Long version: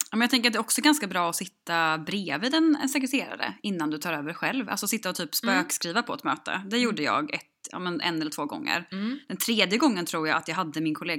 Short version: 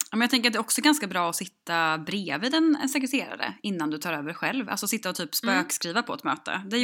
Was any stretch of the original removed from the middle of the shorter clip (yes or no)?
no